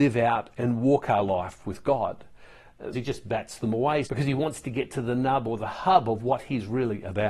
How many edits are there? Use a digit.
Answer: 2